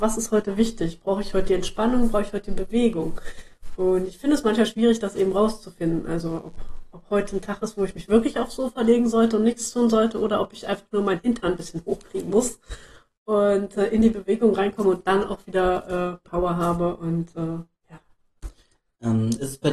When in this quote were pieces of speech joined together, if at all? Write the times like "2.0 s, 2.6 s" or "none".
16.2 s